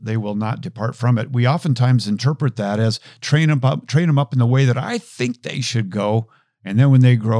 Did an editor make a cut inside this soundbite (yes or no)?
no